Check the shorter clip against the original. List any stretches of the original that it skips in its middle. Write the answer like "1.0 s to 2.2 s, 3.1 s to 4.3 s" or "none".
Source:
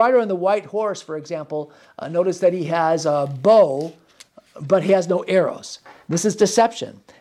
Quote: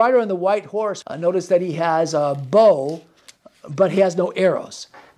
1.0 s to 1.9 s